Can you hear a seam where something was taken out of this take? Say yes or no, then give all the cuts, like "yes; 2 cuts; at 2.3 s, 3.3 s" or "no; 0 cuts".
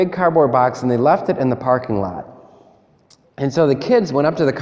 no; 0 cuts